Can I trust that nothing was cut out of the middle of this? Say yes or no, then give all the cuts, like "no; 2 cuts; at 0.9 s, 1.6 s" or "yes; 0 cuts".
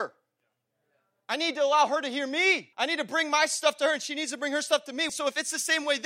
no; 2 cuts; at 2.7 s, 5.1 s